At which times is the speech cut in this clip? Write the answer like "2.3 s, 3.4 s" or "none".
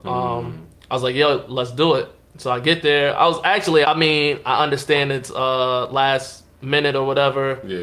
3.8 s